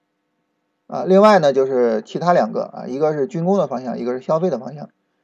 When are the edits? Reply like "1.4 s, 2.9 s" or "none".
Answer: none